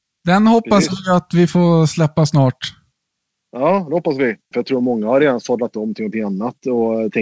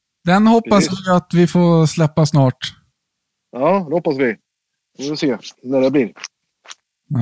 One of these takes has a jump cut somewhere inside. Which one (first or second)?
first